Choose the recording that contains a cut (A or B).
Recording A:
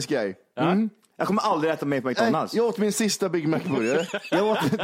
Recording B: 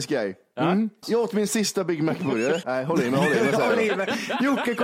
B